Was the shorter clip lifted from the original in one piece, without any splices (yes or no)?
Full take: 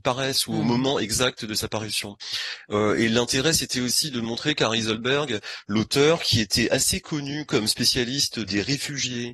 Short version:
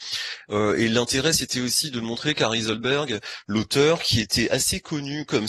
yes